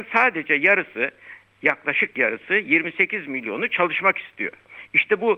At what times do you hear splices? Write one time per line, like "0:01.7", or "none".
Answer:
none